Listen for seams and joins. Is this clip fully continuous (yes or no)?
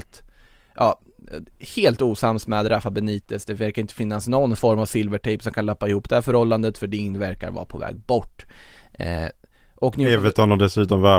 yes